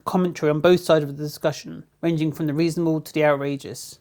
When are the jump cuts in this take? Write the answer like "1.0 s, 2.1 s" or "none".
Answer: 1.9 s